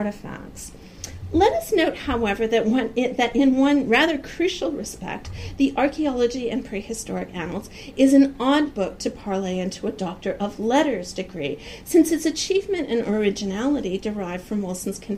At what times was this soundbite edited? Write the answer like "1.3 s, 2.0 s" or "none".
none